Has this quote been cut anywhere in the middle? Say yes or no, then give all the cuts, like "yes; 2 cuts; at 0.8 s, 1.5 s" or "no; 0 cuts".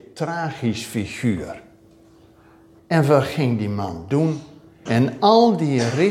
yes; 2 cuts; at 2.8 s, 4.9 s